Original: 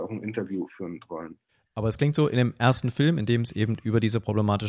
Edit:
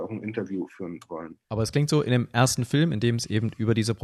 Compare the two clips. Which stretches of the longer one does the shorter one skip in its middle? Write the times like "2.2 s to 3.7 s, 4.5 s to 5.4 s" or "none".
1.4 s to 1.7 s

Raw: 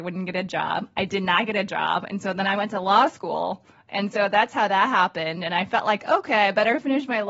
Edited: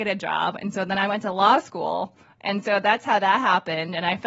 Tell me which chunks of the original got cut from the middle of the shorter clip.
none

